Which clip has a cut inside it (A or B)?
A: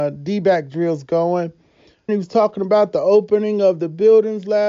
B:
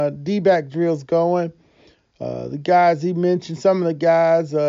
A